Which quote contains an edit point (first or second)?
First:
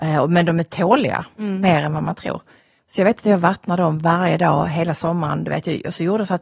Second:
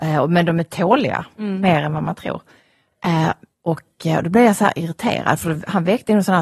first